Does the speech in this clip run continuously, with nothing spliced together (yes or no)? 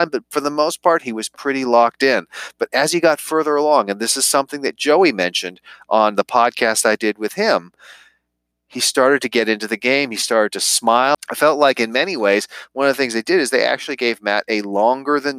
no